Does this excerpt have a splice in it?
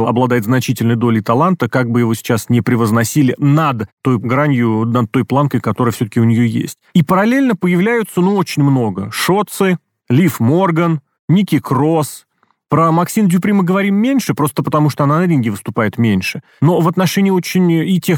yes; 1 cut; at 6.9 s

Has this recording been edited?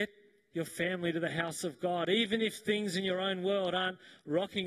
no; 0 cuts

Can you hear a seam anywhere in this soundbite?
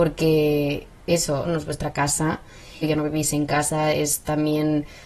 yes; 2 cuts; at 1.4 s, 2.8 s

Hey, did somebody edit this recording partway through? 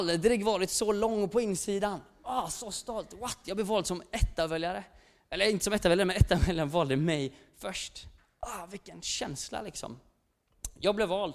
no; 0 cuts

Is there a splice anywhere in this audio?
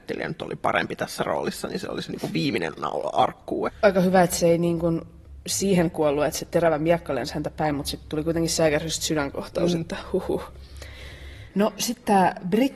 yes; 2 cuts; at 3.7 s, 11.5 s

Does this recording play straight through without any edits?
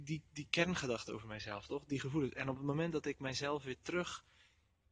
yes; 0 cuts

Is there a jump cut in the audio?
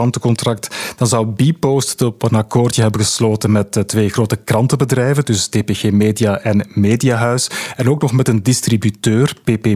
no; 0 cuts

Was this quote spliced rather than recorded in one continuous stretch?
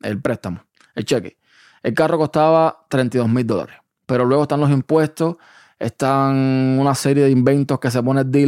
no; 0 cuts

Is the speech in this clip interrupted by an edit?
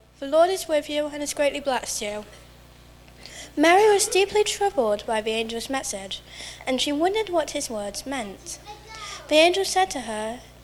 no; 0 cuts

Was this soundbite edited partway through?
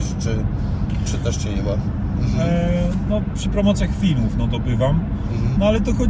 yes; 1 cut; at 2.1 s

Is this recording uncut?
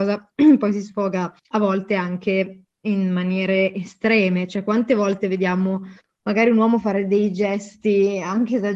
no; 1 cut; at 1.4 s

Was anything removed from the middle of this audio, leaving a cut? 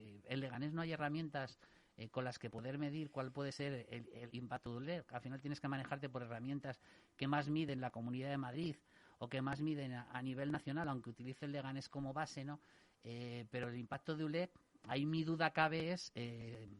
yes; 1 cut; at 4.3 s

